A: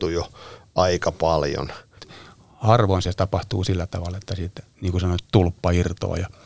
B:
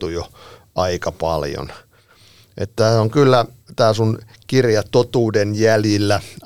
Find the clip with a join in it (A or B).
A